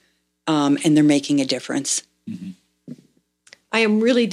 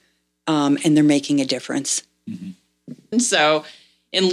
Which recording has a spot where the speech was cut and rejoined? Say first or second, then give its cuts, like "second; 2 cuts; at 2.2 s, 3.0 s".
second; 1 cut; at 3.1 s